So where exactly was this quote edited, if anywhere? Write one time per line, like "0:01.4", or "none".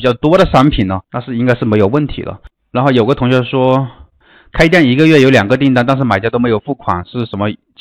0:01.0